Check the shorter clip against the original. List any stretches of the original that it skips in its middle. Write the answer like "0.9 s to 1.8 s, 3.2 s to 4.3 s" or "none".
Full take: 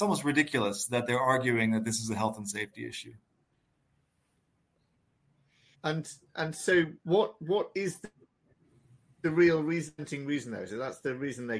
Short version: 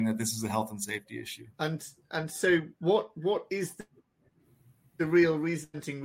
3.2 s to 5.8 s